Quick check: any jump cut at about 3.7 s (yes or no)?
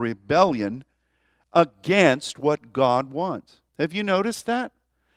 yes